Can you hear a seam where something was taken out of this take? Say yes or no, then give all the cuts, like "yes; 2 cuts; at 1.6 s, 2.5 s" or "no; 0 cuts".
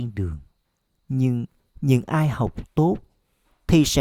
yes; 1 cut; at 1.0 s